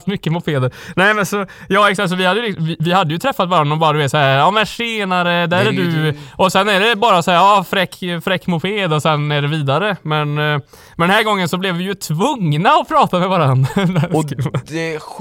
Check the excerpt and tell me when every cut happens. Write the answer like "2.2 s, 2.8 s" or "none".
none